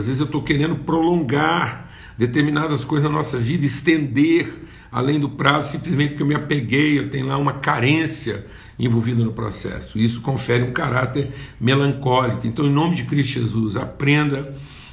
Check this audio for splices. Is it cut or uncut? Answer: uncut